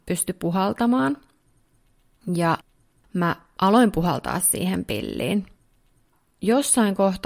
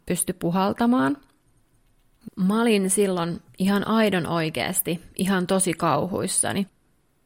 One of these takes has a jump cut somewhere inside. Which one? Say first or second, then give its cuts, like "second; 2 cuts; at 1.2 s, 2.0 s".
second; 1 cut; at 2.3 s